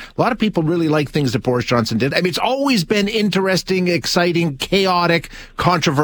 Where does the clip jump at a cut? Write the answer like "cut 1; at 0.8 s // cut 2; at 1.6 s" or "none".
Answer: cut 1; at 2.1 s